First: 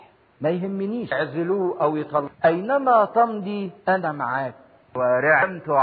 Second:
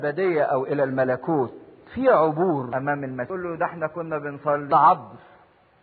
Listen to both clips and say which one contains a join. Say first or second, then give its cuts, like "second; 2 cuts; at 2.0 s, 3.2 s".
first; 1 cut; at 3.8 s